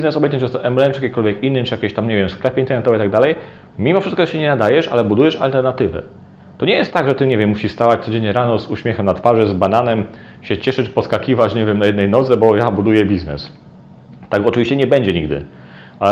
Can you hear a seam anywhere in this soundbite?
yes; 1 cut; at 3.7 s

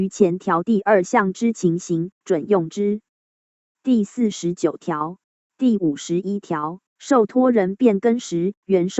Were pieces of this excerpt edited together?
yes; 2 cuts; at 5.5 s, 6.9 s

